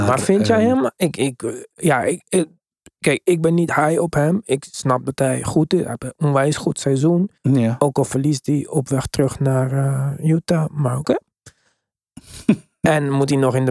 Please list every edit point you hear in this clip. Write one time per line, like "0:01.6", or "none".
0:07.4